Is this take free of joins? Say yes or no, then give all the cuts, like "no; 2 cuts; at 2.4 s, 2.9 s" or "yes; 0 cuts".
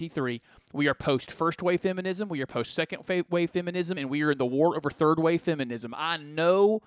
yes; 0 cuts